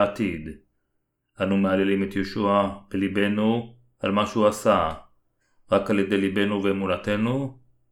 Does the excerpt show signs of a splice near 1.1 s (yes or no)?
no